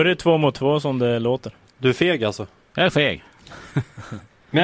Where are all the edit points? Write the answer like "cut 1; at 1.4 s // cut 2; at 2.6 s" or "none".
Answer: cut 1; at 1.7 s